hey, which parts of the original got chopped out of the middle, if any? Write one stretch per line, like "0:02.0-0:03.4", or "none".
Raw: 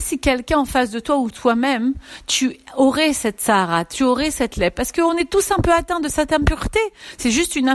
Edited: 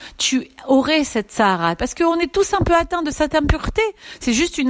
0:03.9-0:04.7